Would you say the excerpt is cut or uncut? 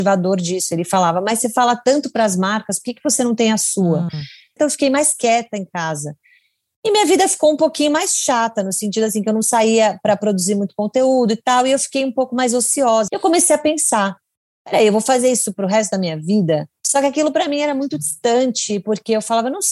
cut